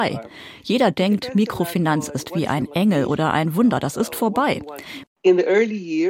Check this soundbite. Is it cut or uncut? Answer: cut